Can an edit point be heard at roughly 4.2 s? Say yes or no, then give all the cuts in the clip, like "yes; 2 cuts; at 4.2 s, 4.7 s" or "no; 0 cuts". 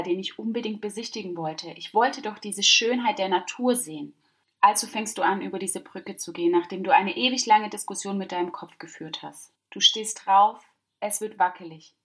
no; 0 cuts